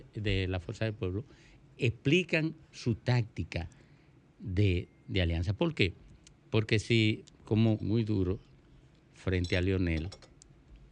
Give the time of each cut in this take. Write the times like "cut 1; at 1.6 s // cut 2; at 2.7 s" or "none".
cut 1; at 7.8 s